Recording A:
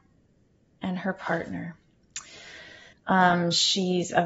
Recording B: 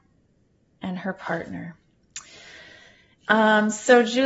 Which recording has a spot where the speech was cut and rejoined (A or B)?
A